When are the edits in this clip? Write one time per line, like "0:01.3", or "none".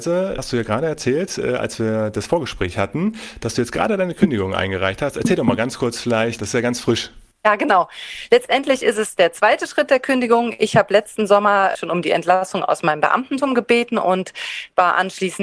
none